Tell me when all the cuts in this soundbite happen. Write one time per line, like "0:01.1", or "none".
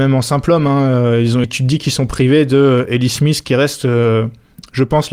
0:01.4